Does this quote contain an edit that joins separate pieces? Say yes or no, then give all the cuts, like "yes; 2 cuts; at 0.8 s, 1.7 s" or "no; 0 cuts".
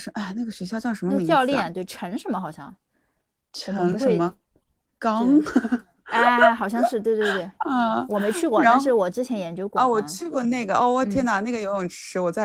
no; 0 cuts